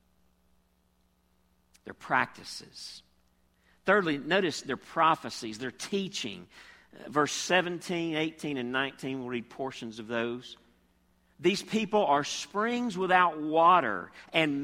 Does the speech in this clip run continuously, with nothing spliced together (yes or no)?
yes